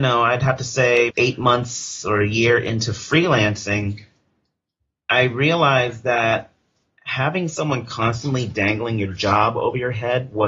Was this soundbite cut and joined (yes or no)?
yes